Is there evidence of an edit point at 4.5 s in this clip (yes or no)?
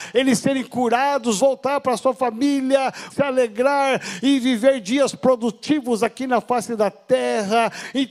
no